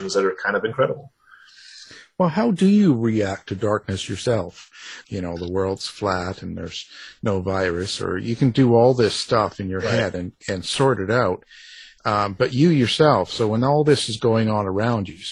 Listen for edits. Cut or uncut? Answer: cut